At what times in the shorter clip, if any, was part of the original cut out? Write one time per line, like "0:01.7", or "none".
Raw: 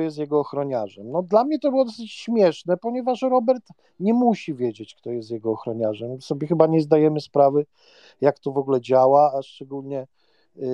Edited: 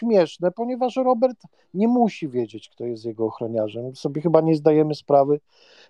none